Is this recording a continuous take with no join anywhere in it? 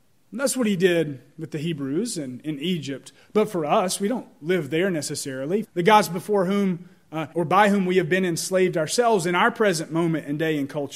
no; 2 cuts; at 5.6 s, 7.3 s

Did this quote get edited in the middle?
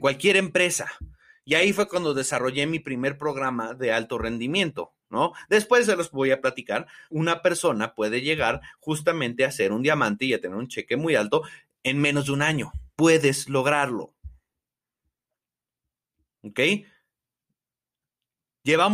yes; 2 cuts; at 7.1 s, 12.9 s

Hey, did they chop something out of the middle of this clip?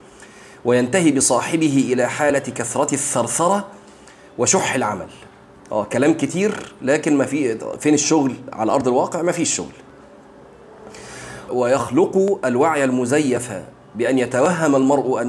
yes; 1 cut; at 11.5 s

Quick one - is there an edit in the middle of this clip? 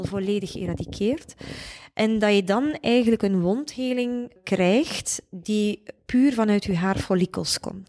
no; 0 cuts

